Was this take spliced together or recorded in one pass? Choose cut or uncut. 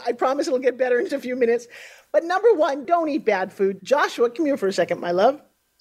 cut